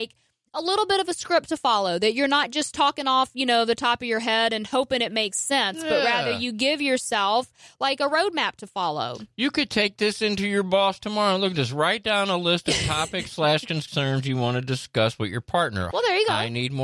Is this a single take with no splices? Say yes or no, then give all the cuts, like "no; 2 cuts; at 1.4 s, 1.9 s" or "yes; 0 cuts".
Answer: no; 1 cut; at 15.9 s